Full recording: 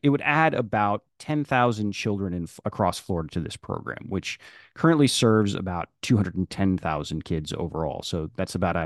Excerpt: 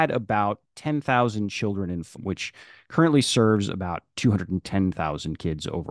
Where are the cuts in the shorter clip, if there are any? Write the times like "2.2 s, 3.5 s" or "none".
2.2 s